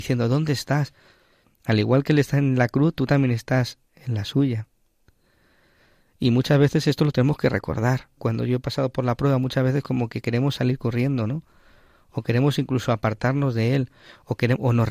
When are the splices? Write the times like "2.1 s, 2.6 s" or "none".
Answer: 1.4 s, 8.2 s